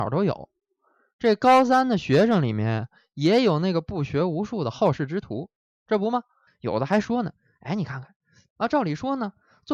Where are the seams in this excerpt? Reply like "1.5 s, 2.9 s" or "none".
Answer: 6.5 s, 8.5 s

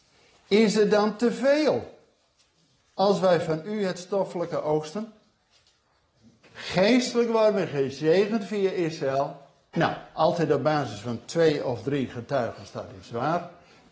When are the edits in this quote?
6.4 s, 9.7 s

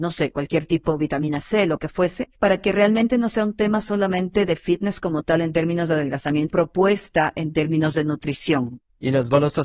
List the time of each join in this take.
2.4 s, 6.5 s

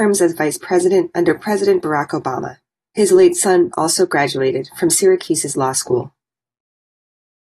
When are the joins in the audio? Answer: 3.7 s

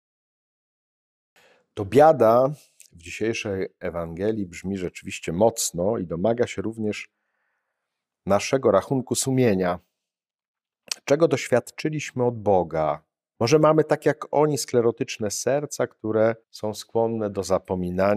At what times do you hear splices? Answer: 13.3 s, 16.4 s

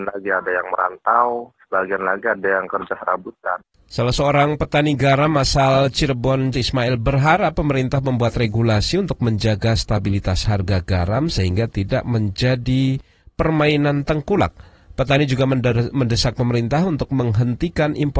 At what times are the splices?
6.5 s

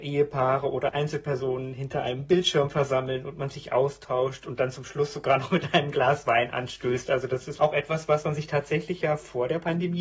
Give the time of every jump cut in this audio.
7.6 s

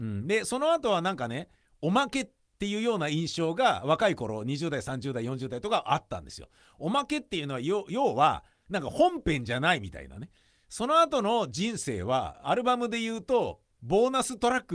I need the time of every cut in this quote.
none

